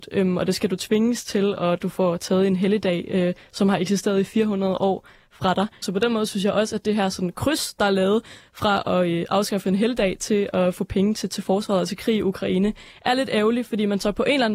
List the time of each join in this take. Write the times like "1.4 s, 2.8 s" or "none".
5.8 s